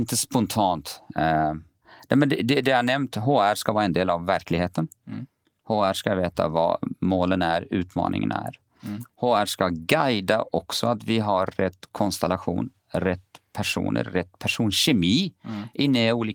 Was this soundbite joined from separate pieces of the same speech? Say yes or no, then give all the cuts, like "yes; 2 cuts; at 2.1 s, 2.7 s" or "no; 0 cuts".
no; 0 cuts